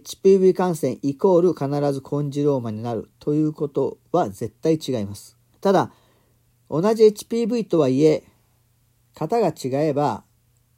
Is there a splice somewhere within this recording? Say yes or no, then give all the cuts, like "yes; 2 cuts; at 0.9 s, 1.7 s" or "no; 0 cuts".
yes; 1 cut; at 5.5 s